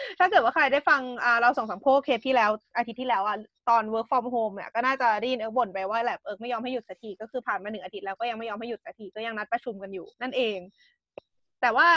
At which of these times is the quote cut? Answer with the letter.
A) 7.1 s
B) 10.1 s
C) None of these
B